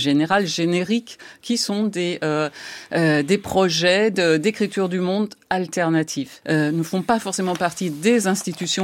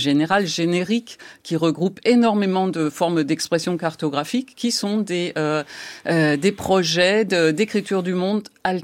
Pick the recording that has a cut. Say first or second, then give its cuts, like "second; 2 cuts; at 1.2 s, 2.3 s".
first; 2 cuts; at 1.4 s, 6.4 s